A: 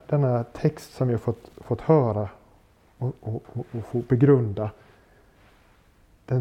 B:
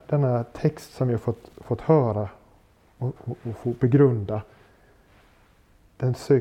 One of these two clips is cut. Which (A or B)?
B